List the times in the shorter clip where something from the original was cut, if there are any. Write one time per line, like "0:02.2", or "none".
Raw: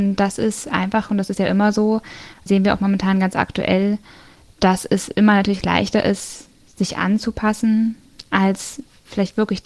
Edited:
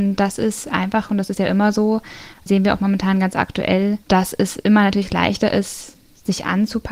0:04.0